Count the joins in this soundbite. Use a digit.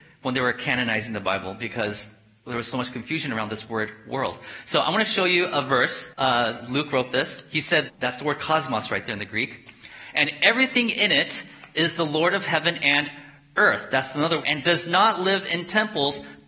3